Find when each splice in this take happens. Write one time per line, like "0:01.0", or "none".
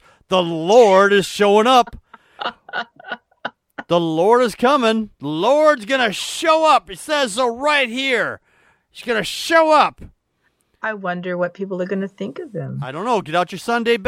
none